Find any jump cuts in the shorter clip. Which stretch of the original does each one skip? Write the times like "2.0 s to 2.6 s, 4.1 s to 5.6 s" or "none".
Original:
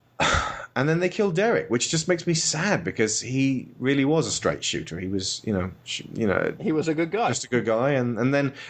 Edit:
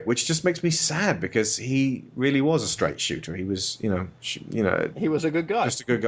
none